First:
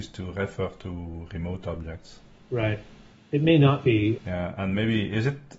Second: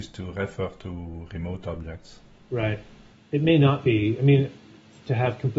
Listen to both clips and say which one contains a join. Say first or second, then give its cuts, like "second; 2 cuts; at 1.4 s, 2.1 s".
first; 1 cut; at 4.2 s